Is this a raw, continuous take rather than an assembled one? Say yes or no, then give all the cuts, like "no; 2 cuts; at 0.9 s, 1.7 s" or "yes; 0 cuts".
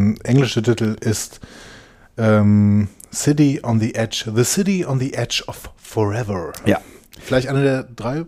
yes; 0 cuts